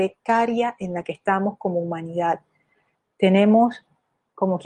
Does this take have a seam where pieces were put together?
no; 0 cuts

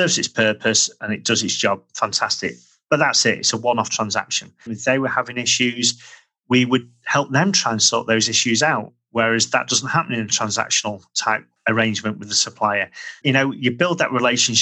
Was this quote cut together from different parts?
yes; 2 cuts; at 4.7 s, 13.2 s

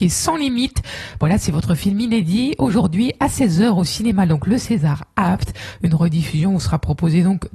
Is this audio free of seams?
yes; 0 cuts

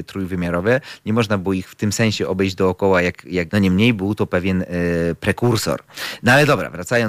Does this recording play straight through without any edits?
no; 1 cut; at 3.5 s

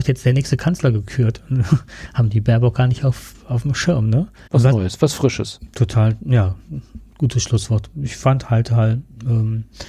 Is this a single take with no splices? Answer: no; 1 cut; at 4.5 s

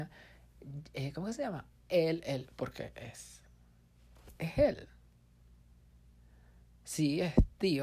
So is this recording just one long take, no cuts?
yes; 0 cuts

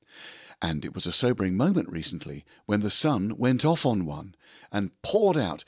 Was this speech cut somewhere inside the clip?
no; 0 cuts

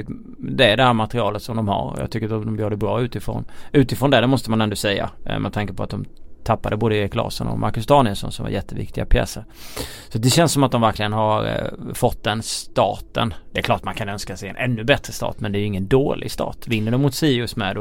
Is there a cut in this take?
no; 0 cuts

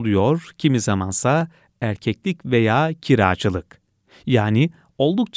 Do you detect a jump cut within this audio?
no; 0 cuts

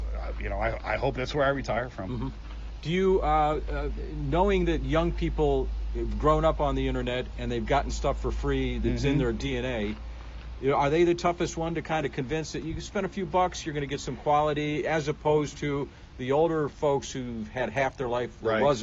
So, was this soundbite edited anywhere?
no; 0 cuts

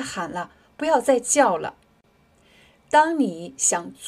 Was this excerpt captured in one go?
yes; 0 cuts

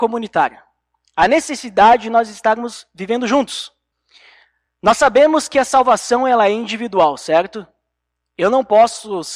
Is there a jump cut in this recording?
no; 0 cuts

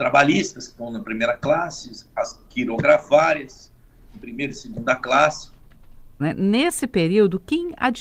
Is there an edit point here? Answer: yes; 1 cut; at 6.2 s

